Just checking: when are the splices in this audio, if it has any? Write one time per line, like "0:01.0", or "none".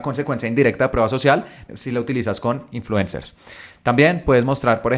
0:01.7